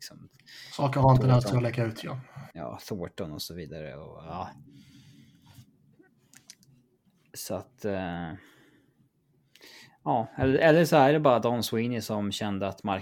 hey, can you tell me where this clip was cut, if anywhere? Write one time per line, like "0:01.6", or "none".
0:02.5